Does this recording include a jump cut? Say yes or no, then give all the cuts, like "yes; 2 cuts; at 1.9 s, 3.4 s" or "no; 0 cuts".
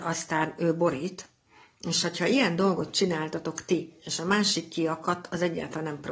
no; 0 cuts